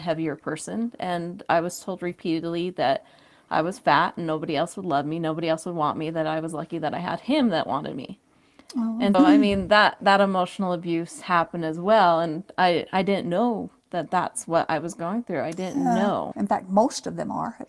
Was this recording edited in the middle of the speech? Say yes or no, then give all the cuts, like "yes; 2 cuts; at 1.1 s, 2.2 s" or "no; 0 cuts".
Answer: yes; 2 cuts; at 9.1 s, 16.3 s